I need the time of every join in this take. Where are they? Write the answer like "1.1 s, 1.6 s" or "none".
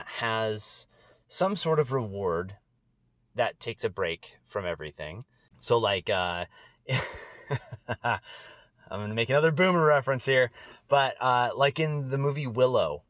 5.5 s